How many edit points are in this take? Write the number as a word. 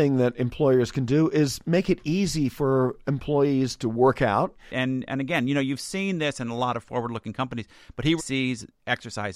two